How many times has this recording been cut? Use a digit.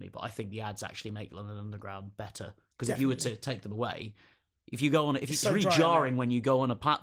0